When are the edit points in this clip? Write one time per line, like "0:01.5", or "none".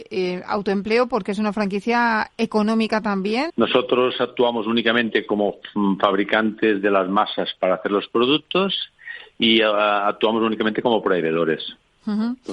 0:03.5

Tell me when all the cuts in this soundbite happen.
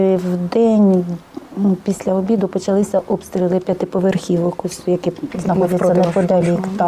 none

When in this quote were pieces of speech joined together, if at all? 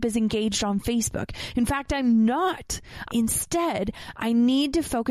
0:03.1

